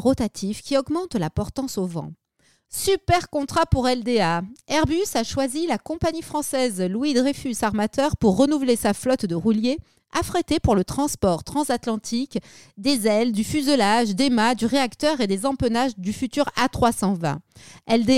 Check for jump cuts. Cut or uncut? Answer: cut